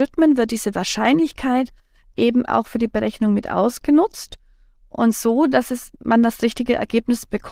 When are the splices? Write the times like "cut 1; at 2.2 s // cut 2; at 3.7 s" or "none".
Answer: none